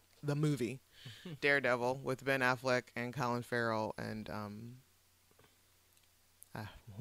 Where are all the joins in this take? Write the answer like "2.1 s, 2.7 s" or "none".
none